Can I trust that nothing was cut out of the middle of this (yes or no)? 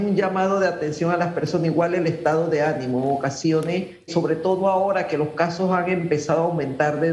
no